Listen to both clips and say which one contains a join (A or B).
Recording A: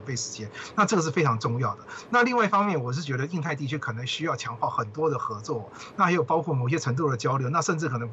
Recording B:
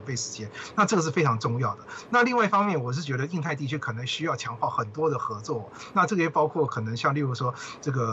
A